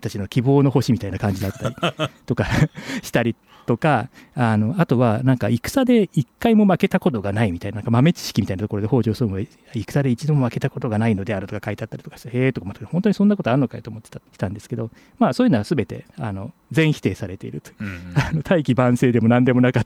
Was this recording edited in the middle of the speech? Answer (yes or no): yes